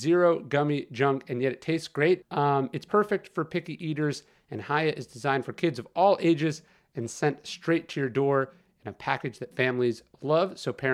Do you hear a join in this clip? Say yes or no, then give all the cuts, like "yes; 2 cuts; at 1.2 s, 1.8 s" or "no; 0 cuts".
yes; 1 cut; at 2.2 s